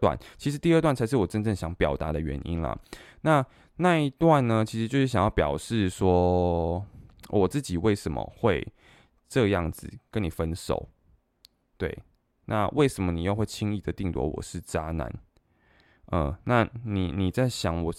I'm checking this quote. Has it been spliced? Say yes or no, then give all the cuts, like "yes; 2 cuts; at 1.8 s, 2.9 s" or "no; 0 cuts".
no; 0 cuts